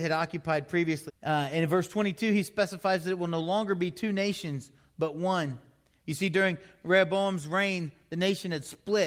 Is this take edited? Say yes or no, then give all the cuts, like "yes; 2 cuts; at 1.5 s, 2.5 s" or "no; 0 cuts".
yes; 1 cut; at 1.1 s